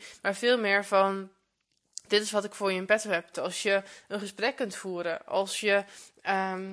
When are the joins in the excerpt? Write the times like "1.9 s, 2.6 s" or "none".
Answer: 3.3 s

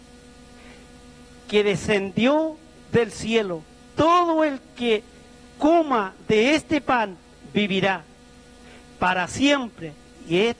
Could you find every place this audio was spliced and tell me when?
none

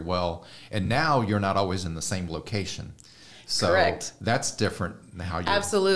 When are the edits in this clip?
none

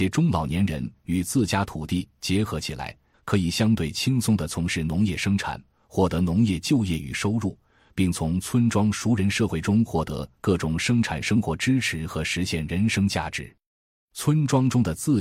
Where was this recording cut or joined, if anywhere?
3.1 s

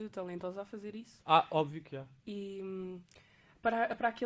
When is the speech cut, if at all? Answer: none

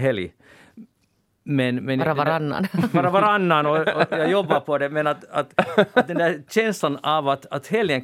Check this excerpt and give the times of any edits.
none

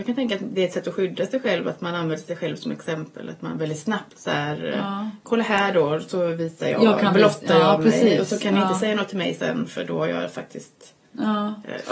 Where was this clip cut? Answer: none

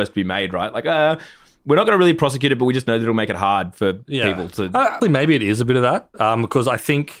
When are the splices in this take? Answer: 5.0 s

